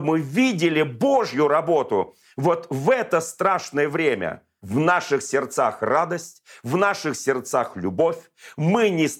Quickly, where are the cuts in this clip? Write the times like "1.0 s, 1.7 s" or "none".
4.6 s